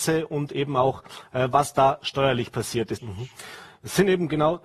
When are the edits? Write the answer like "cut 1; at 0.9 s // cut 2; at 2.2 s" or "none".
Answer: cut 1; at 3.0 s